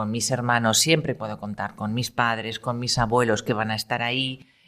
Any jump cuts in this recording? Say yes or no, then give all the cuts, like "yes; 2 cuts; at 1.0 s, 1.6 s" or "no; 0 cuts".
no; 0 cuts